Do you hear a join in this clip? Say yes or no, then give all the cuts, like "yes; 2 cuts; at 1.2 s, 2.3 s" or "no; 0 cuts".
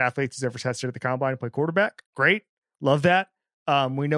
yes; 1 cut; at 2.1 s